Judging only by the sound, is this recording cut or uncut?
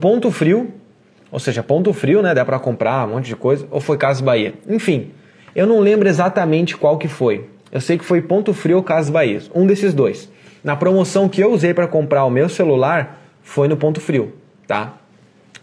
uncut